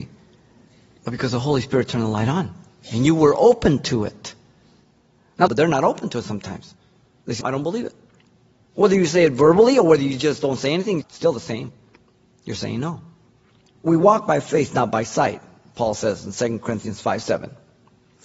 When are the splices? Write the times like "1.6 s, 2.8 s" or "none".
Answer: 5.5 s, 7.4 s, 11.0 s